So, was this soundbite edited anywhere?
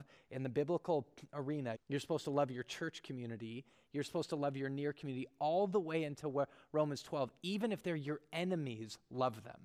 yes; 1 cut; at 1.7 s

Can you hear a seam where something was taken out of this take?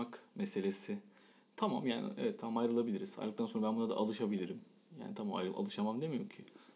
no; 0 cuts

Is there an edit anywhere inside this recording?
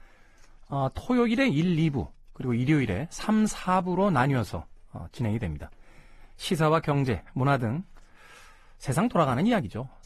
no; 0 cuts

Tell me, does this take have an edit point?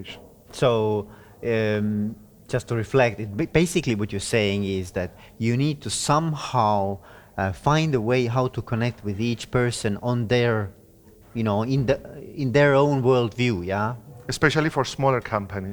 no; 0 cuts

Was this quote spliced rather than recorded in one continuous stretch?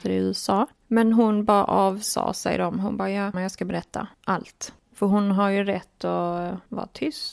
yes; 1 cut; at 3.3 s

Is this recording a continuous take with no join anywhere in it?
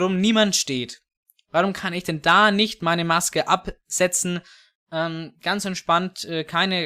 yes; 0 cuts

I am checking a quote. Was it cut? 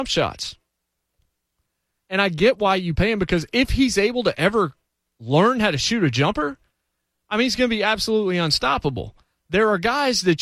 no; 0 cuts

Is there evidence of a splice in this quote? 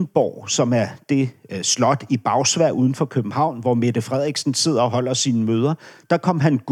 no; 0 cuts

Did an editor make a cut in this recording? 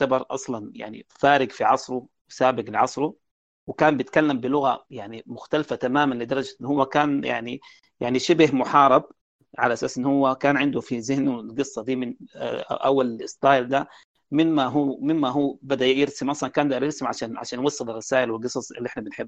no; 0 cuts

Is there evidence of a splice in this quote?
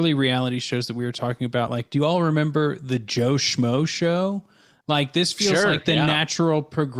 no; 0 cuts

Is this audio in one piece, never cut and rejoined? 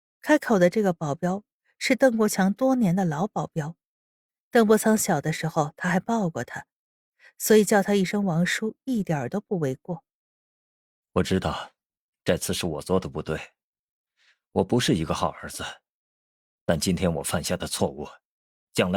yes; 0 cuts

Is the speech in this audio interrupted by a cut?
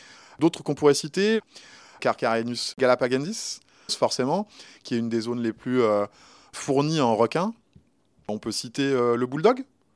yes; 1 cut; at 3.9 s

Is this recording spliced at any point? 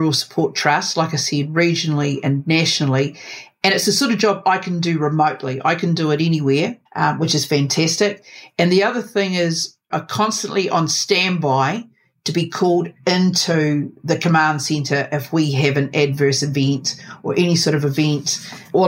yes; 2 cuts; at 6.9 s, 9.9 s

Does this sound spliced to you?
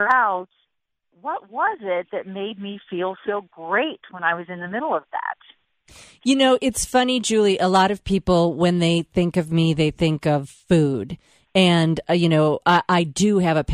no; 0 cuts

